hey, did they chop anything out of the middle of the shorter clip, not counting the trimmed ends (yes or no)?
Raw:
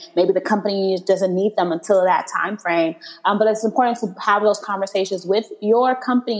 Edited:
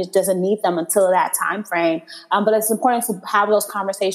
no